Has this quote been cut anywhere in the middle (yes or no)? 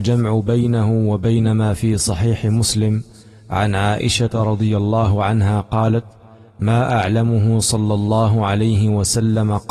no